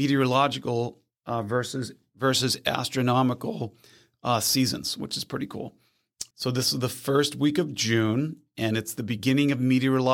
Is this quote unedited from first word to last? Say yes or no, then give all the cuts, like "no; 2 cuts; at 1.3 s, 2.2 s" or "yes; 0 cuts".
no; 1 cut; at 6.3 s